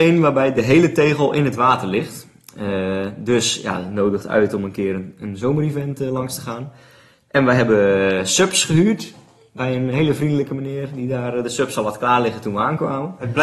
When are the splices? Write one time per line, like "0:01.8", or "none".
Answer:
none